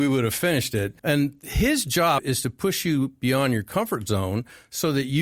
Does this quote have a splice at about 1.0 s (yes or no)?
yes